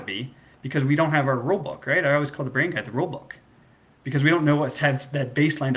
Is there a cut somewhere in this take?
no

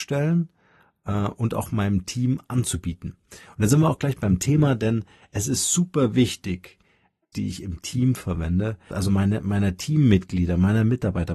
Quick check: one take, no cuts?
no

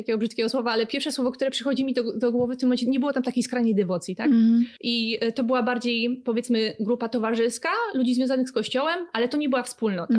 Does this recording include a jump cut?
no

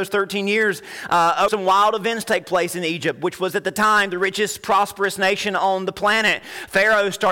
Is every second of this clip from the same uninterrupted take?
no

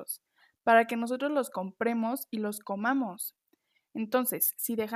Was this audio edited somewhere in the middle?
no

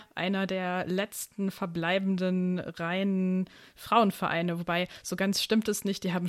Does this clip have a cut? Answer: no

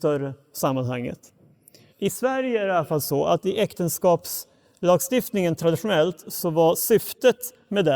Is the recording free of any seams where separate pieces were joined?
no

